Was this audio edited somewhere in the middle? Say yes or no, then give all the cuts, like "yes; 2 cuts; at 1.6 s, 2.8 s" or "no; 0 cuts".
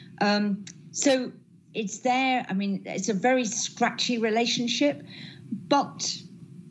no; 0 cuts